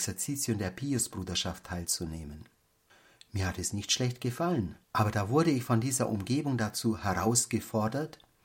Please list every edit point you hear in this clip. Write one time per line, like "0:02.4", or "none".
0:04.8